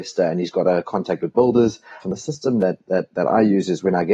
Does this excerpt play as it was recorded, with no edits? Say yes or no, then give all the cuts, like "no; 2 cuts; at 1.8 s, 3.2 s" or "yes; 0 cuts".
no; 1 cut; at 2.0 s